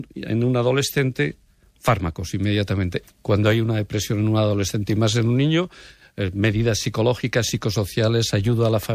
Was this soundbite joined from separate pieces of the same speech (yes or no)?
yes